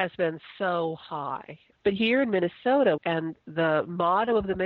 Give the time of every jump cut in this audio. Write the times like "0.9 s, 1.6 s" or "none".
1.7 s, 3.0 s